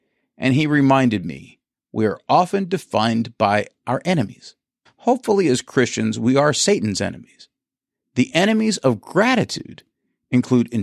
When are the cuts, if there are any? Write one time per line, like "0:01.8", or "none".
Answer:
0:04.9